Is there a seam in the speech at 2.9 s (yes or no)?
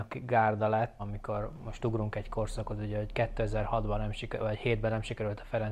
no